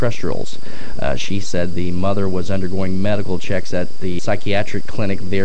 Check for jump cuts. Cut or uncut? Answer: uncut